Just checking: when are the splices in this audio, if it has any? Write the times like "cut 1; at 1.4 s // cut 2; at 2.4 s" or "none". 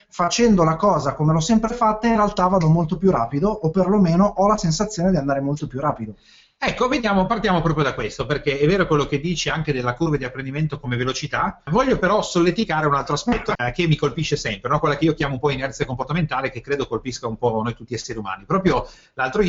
cut 1; at 11.7 s // cut 2; at 13.6 s